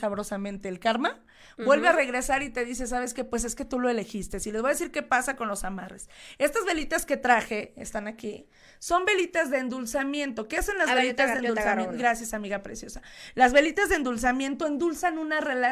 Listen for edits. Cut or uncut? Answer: uncut